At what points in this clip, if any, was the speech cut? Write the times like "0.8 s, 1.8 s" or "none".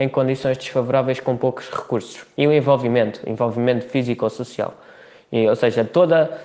2.3 s